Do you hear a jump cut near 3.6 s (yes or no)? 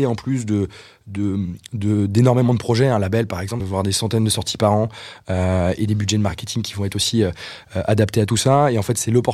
yes